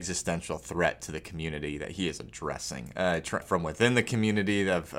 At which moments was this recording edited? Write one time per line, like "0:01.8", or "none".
0:03.4

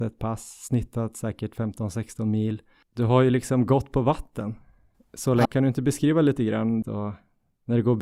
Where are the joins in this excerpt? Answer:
0:05.5
0:06.8

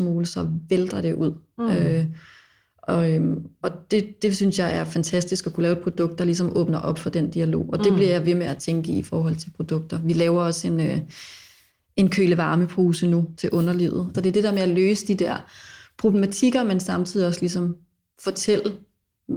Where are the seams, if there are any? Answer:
0:14.1

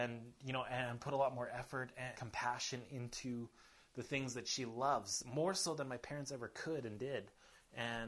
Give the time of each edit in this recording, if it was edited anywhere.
0:02.1

